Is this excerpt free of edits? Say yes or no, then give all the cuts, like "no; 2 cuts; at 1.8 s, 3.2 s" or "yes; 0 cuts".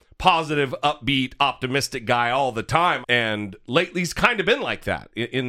no; 1 cut; at 3.0 s